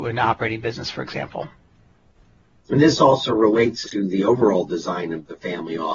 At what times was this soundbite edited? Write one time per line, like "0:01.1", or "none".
0:03.8